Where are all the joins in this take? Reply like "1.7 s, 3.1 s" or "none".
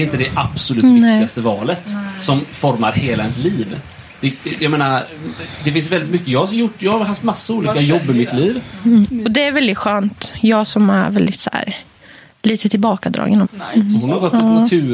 9.0 s, 13.4 s